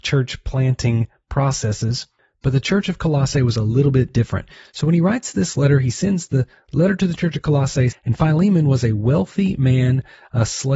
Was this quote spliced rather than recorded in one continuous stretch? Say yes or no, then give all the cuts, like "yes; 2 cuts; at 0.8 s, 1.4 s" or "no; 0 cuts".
yes; 1 cut; at 7.9 s